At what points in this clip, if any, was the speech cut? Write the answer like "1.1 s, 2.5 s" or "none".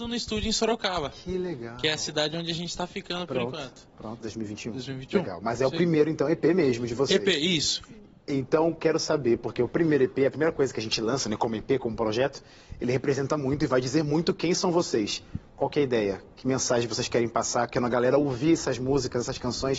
4.2 s